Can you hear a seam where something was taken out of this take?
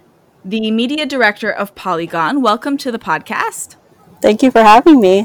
no; 0 cuts

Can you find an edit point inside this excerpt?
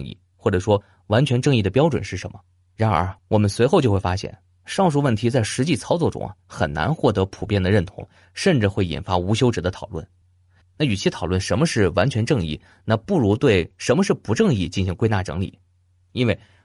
yes; 1 cut; at 10.6 s

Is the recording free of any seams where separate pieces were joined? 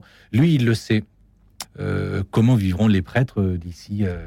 no; 1 cut; at 1.6 s

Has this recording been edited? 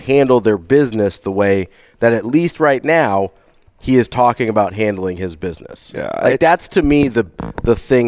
no; 0 cuts

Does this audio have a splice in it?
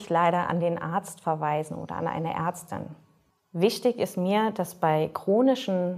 no; 0 cuts

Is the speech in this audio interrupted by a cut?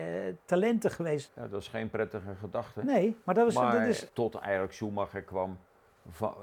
yes; 2 cuts; at 1.3 s, 4.1 s

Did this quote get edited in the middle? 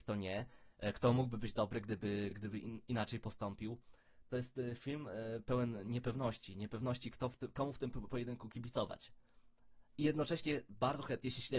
no; 0 cuts

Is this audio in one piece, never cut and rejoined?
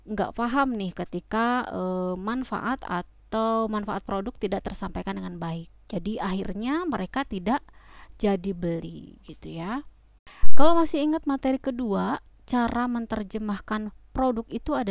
yes; 0 cuts

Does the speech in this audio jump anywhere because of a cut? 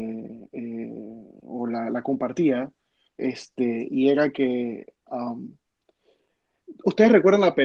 no; 0 cuts

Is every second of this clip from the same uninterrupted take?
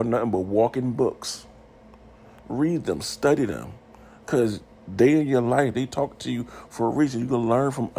no; 1 cut; at 5.7 s

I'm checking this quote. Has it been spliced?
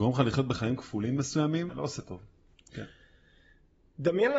yes; 1 cut; at 1.7 s

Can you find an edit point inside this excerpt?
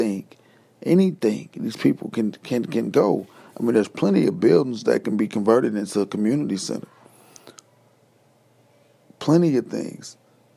no; 0 cuts

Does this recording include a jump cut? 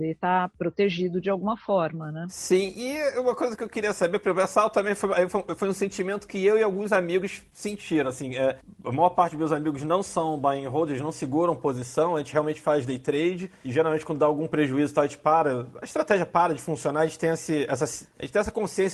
no; 0 cuts

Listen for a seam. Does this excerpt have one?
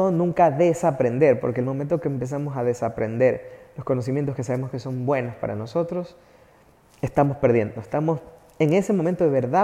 no; 0 cuts

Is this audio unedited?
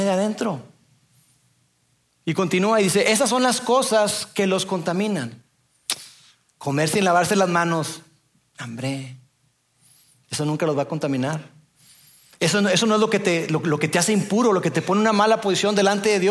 yes; 0 cuts

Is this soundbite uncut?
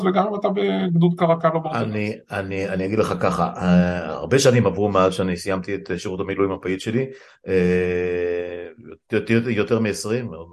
yes; 0 cuts

